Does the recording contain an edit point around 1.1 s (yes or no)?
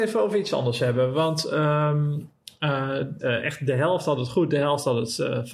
no